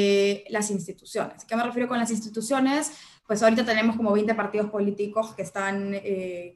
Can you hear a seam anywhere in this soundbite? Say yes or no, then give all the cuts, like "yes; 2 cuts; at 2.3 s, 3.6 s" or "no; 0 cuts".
no; 0 cuts